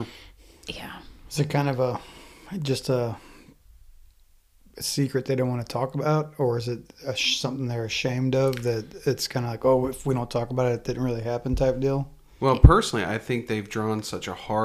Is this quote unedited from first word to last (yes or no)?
yes